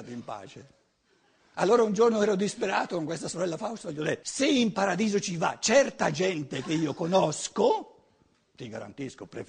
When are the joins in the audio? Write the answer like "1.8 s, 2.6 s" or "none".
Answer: 1.5 s, 4.2 s